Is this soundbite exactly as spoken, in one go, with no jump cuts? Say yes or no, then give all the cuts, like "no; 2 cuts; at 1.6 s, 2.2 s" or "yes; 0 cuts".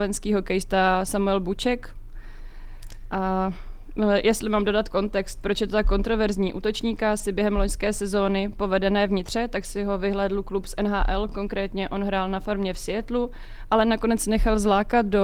yes; 0 cuts